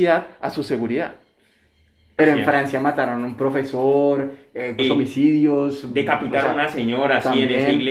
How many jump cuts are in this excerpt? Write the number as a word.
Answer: two